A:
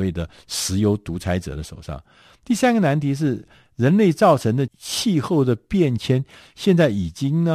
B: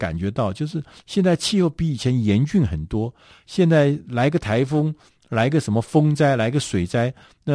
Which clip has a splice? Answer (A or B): A